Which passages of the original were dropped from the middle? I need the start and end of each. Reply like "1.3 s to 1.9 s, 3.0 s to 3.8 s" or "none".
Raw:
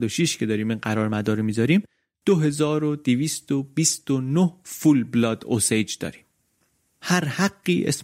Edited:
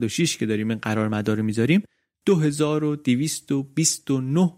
none